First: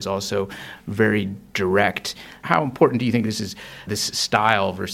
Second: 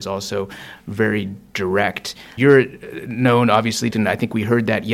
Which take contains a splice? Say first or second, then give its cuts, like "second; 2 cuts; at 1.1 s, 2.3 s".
second; 2 cuts; at 2.4 s, 3.9 s